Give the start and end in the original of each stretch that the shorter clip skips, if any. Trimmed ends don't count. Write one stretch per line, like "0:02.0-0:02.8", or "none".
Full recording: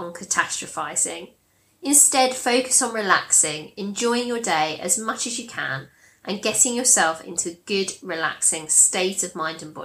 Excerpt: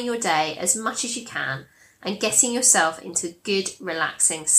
none